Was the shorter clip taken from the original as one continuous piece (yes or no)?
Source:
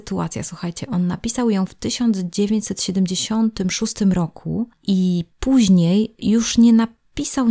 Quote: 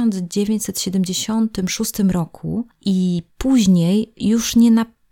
yes